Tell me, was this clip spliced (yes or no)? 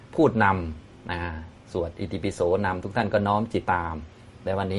yes